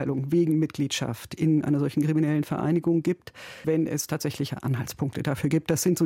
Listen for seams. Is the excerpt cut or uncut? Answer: cut